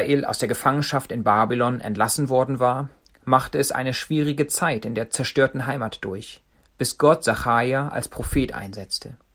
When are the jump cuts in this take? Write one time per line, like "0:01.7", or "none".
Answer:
none